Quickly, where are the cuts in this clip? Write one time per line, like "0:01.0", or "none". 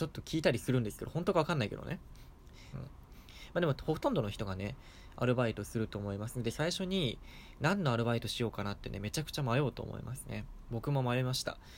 0:02.7
0:10.6